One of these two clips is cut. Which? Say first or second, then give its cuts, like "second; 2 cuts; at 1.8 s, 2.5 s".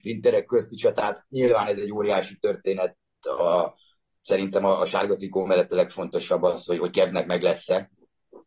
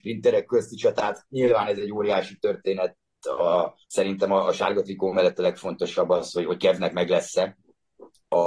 second; 1 cut; at 3.8 s